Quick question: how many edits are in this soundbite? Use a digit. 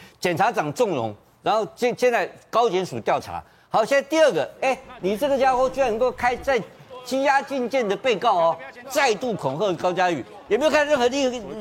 2